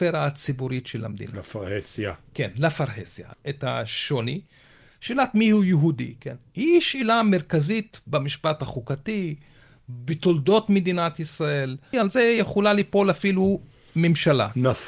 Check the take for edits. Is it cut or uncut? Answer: cut